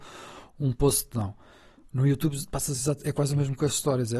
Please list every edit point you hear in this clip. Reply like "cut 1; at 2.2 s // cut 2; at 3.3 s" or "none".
none

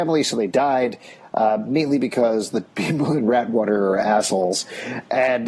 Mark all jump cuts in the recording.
none

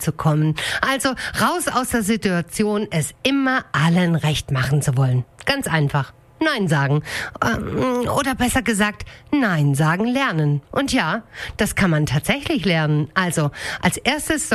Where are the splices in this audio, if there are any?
cut 1; at 10.6 s

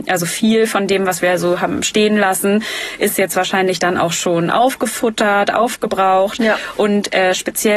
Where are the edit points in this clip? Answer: none

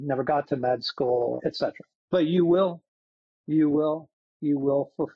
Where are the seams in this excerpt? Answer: none

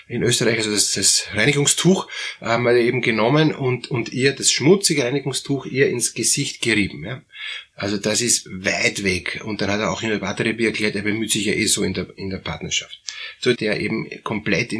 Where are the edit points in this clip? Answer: cut 1; at 7.7 s // cut 2; at 13.5 s

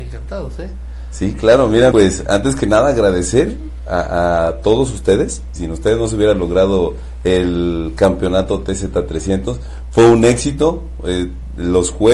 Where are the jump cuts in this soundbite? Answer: cut 1; at 1.9 s // cut 2; at 5.6 s

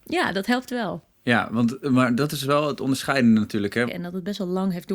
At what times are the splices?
cut 1; at 1.1 s // cut 2; at 3.9 s

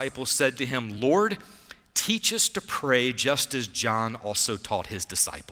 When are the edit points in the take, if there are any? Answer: none

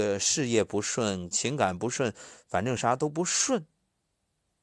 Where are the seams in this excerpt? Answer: cut 1; at 1.3 s // cut 2; at 2.8 s

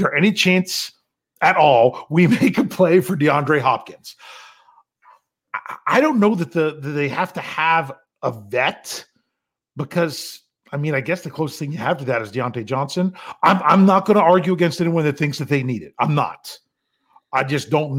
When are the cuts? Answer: none

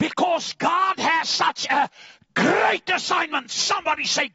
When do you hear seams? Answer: none

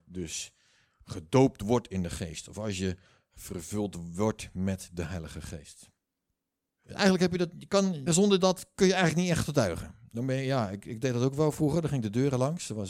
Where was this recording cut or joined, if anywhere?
cut 1; at 6.7 s // cut 2; at 8.1 s

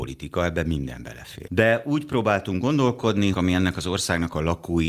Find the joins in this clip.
cut 1; at 1.5 s // cut 2; at 3.3 s

